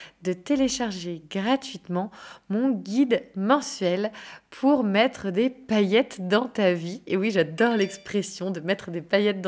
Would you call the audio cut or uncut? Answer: uncut